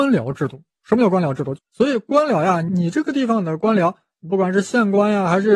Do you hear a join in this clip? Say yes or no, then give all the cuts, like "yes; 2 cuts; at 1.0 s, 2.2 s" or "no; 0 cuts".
yes; 1 cut; at 1.5 s